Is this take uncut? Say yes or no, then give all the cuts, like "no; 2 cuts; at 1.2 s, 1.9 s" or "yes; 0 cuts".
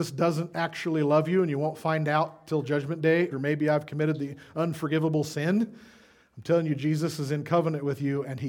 no; 1 cut; at 3.3 s